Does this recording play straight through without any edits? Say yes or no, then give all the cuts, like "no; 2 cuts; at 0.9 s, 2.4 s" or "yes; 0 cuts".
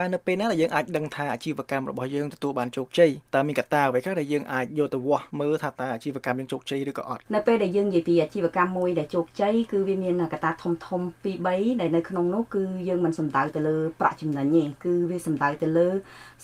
no; 3 cuts; at 3.3 s, 5.3 s, 7.3 s